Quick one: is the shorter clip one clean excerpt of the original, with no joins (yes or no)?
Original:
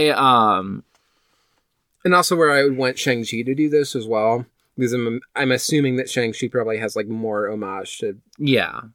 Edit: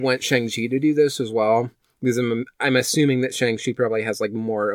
yes